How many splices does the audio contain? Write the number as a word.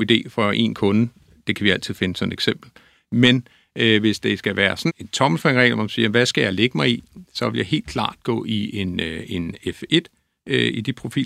one